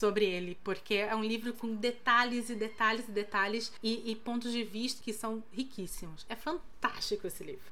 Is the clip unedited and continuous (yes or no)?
no